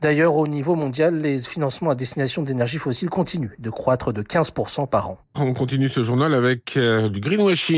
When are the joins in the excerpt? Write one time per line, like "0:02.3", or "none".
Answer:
0:05.3